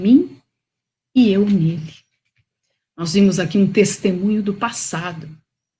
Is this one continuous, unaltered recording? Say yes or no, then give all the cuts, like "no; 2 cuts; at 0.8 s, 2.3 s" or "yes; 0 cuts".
no; 1 cut; at 2.8 s